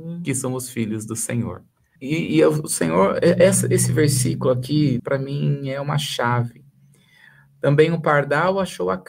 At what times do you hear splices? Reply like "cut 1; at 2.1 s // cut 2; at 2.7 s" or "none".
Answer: cut 1; at 2.0 s // cut 2; at 5.0 s